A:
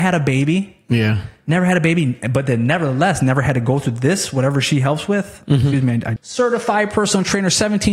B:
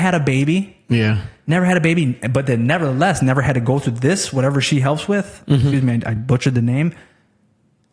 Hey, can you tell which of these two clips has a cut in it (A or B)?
A